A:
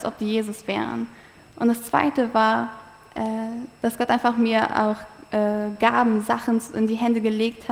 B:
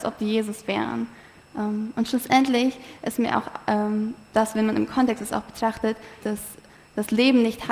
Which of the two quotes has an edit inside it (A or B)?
B